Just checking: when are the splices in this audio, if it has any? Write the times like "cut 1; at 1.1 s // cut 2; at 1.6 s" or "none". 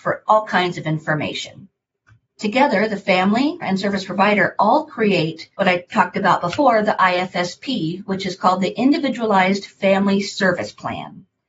cut 1; at 2.3 s // cut 2; at 3.6 s // cut 3; at 5.5 s